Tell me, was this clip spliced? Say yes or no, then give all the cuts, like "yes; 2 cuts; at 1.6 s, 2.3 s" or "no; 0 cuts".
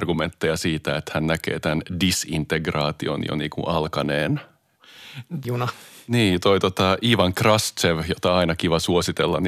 yes; 1 cut; at 5.4 s